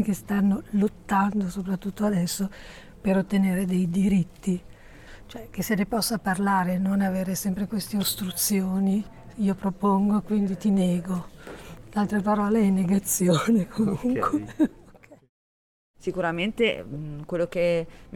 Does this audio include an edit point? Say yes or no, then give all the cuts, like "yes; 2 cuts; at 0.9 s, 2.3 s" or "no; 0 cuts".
no; 0 cuts